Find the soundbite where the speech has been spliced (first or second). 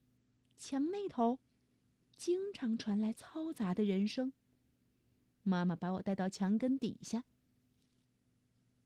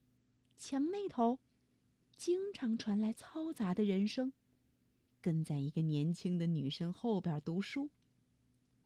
second